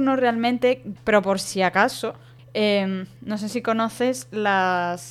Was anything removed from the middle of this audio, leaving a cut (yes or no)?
yes